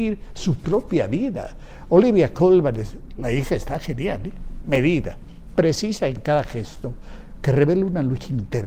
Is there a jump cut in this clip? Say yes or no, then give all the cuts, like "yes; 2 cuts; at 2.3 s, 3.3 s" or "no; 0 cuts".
no; 0 cuts